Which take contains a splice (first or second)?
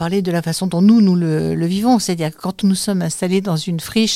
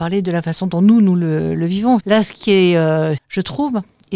second